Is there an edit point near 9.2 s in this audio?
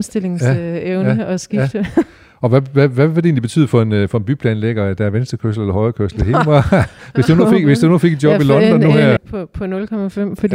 yes; 1 cut; at 9.2 s

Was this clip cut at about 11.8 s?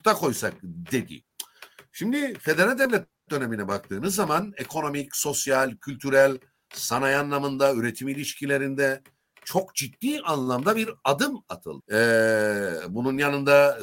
yes; 1 cut; at 11.8 s

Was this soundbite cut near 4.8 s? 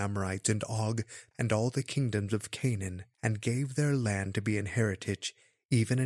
no; 2 cuts; at 1.3 s, 3.1 s

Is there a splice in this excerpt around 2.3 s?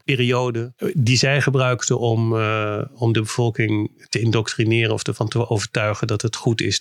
no; 0 cuts

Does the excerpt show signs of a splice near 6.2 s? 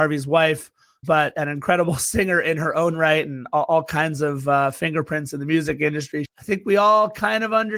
yes; 2 cuts; at 1.0 s, 6.2 s

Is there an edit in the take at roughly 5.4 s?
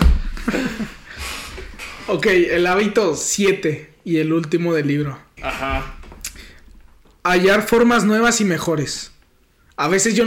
yes; 1 cut; at 5.4 s

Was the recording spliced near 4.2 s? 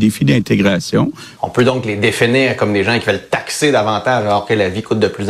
no; 1 cut; at 1.4 s

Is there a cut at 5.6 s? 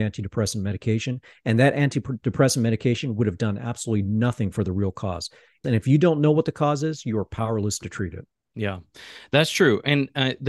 yes; 1 cut; at 5.6 s

